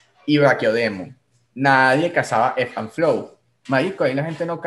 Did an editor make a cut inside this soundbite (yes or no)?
yes